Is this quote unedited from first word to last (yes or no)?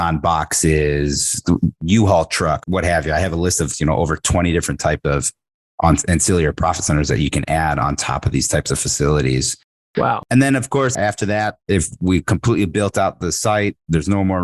no